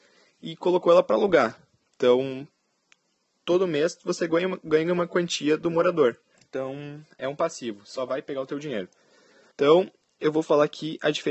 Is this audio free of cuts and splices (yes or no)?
no